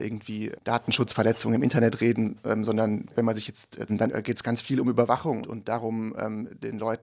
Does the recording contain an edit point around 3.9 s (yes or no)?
yes